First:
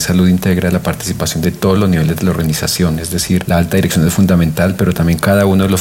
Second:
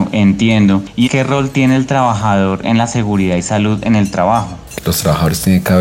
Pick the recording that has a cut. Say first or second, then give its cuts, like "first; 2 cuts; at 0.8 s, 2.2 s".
second; 2 cuts; at 1.1 s, 4.8 s